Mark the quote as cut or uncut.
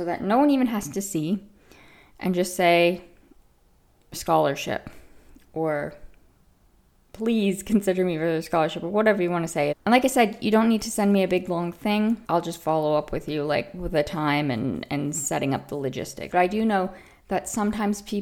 cut